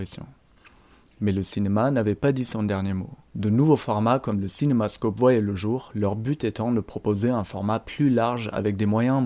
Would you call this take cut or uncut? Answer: uncut